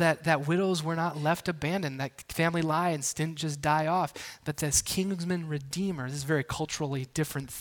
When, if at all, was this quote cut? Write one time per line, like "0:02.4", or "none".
none

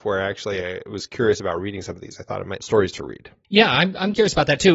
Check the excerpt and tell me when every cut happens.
0:02.6

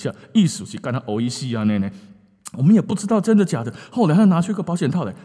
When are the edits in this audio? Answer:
none

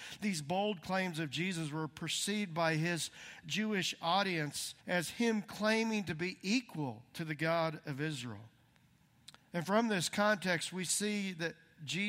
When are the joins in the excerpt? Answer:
0:04.8

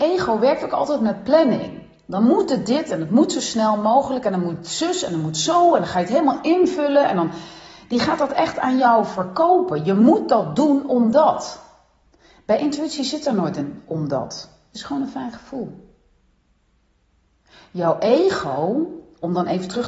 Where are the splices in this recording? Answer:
none

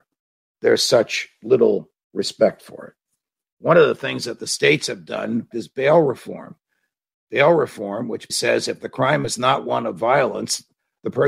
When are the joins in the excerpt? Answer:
0:05.5
0:08.3

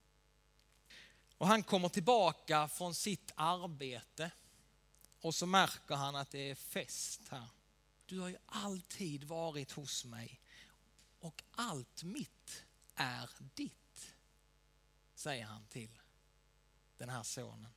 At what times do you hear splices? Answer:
0:08.0

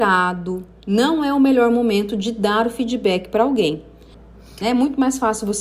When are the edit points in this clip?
0:04.6

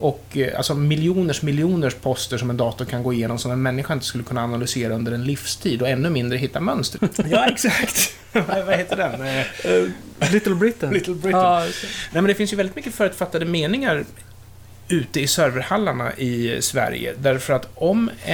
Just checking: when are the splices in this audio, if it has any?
0:07.0

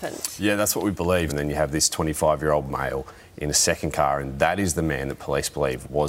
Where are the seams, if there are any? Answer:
0:01.3

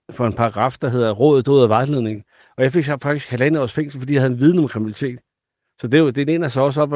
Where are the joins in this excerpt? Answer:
none

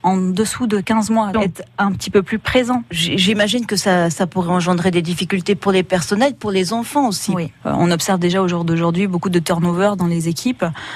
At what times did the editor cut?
0:01.3
0:07.6

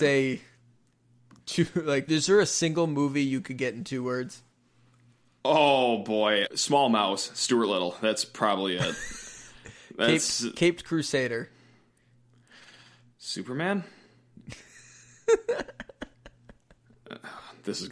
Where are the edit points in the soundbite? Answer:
0:02.1
0:06.5

